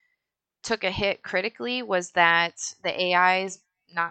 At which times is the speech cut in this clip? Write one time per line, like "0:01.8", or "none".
none